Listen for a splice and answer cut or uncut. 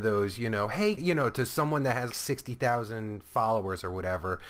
cut